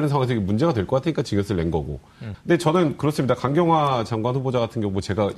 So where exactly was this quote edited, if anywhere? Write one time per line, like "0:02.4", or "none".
0:02.3